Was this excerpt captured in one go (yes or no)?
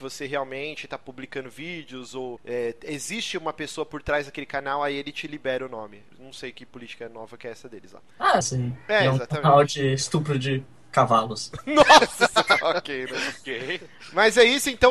no